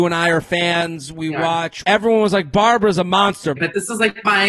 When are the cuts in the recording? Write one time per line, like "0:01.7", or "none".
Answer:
0:01.8
0:03.6